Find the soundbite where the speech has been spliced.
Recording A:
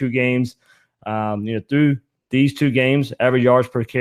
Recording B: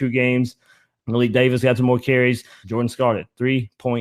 B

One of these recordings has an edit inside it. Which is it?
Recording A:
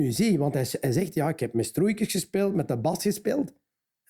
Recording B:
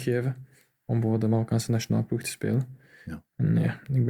A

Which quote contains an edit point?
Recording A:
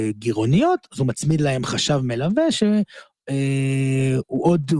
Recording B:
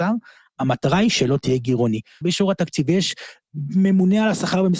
B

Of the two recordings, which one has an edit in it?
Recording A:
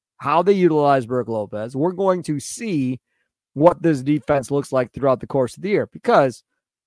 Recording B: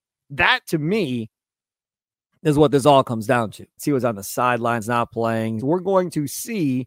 B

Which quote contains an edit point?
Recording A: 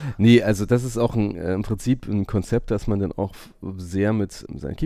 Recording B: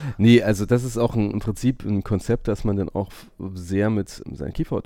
B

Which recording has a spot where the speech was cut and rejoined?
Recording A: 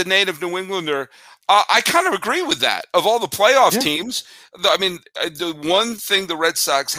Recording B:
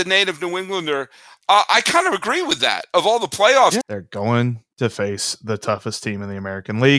B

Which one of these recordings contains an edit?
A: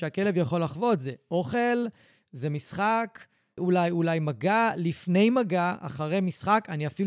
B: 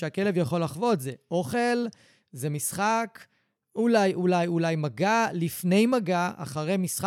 A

